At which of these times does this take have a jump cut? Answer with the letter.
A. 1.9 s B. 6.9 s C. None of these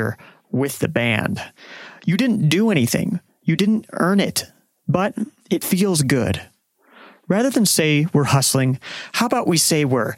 C